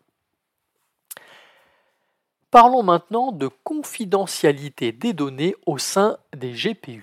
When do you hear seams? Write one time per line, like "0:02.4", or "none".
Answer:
none